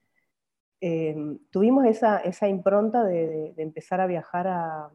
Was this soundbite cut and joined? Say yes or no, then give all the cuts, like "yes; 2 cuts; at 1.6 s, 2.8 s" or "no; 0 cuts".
no; 0 cuts